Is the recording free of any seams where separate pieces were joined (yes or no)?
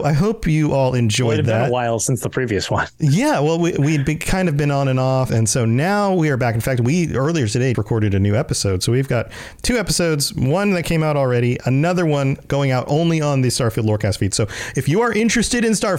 no